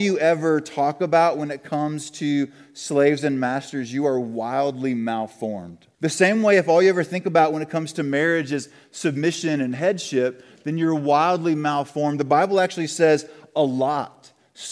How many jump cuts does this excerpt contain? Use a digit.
1